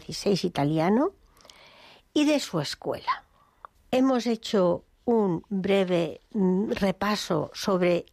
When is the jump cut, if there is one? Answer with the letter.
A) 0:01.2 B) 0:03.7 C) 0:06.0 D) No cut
B